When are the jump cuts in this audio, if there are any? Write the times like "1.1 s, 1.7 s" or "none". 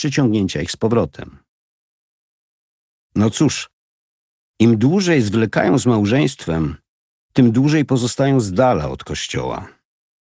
3.0 s